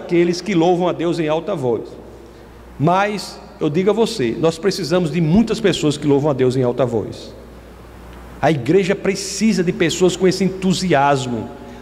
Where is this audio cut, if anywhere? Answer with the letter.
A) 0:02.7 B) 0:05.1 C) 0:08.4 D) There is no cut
C